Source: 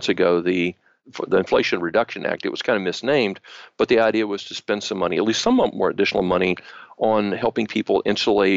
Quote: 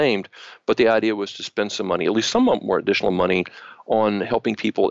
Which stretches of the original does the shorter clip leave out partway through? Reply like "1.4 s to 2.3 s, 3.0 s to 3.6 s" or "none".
none